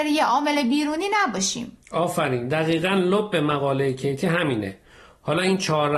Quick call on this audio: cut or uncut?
uncut